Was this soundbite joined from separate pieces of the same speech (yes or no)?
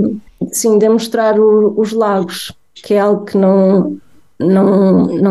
no